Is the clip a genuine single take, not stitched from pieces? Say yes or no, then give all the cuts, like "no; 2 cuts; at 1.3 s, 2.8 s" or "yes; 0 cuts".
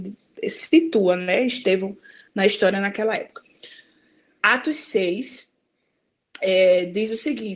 yes; 0 cuts